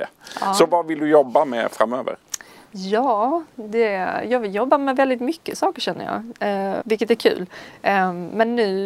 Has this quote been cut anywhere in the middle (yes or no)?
yes